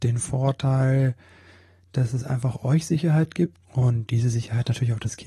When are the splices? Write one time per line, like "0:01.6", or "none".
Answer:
0:03.6